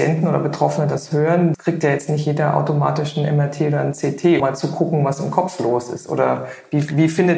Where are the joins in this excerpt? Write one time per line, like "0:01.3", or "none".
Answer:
0:01.5
0:04.4